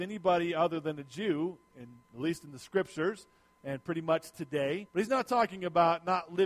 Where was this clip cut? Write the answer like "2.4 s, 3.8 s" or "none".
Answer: 4.9 s